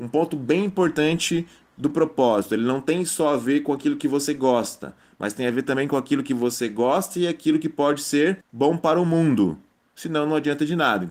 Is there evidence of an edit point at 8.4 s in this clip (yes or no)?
yes